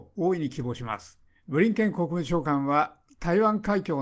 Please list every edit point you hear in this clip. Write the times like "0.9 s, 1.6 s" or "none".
1.3 s